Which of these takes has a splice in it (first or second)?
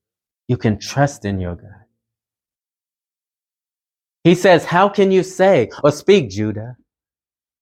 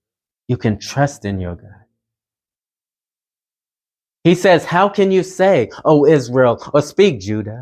first